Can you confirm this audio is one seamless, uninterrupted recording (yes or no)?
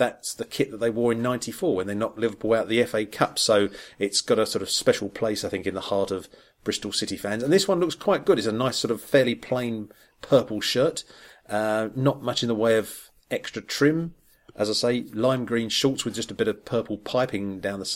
yes